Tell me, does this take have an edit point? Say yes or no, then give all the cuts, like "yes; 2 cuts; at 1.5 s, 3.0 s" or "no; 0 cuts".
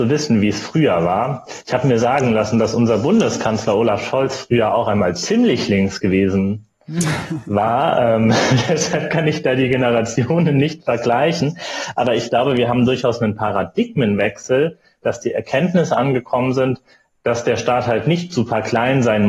no; 0 cuts